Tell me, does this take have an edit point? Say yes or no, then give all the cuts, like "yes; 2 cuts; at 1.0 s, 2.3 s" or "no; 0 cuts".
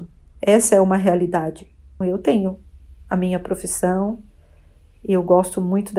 yes; 1 cut; at 2.0 s